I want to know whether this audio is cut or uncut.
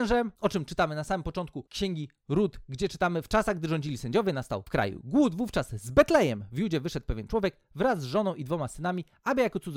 uncut